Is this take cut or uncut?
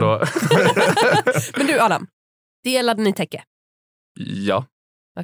uncut